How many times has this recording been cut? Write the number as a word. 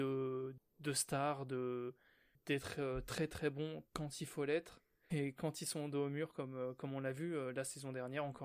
one